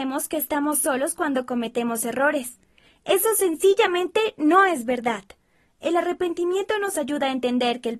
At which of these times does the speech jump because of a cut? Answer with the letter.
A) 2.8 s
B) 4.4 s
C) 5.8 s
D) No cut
D